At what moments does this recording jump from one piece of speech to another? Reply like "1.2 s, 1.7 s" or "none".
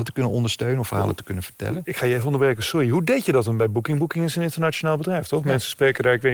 none